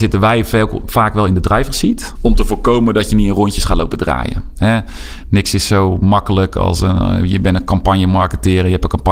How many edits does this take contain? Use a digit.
1